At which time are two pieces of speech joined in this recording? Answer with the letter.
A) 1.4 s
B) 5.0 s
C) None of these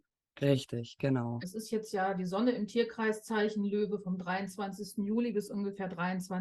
A